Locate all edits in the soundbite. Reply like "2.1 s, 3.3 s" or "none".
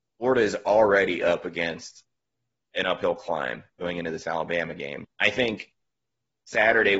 5.0 s